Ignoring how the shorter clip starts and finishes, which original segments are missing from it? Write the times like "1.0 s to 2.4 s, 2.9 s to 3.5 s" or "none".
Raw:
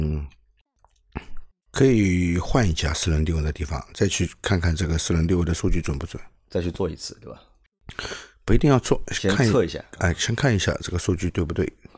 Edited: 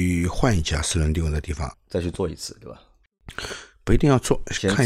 3.9 s to 6.3 s